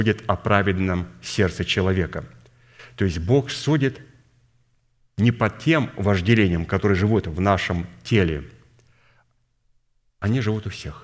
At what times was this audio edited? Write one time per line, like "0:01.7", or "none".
none